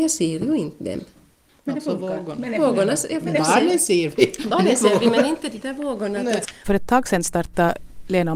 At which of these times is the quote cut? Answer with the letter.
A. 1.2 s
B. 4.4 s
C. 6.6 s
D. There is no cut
C